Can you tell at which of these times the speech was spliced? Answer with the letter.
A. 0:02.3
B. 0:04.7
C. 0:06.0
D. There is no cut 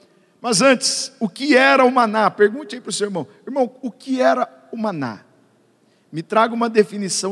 D